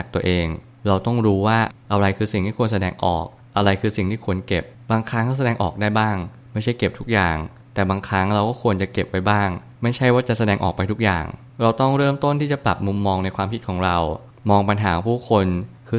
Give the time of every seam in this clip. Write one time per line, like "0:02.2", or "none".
none